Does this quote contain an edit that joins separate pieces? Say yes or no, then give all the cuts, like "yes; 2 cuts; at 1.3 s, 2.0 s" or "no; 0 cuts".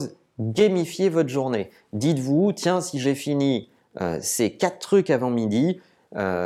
no; 0 cuts